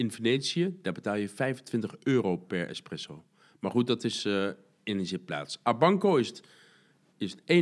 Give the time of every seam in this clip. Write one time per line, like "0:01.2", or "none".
none